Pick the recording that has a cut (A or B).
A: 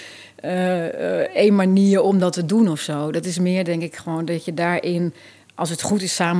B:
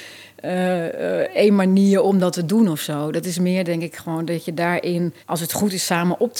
B